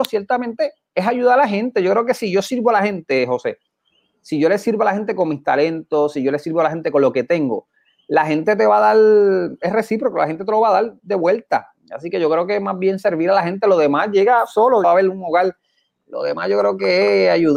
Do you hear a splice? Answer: yes; 1 cut; at 14.8 s

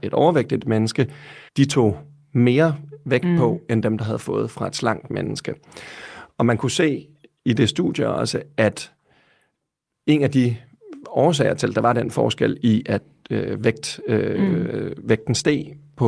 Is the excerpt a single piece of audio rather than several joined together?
no; 1 cut; at 1.5 s

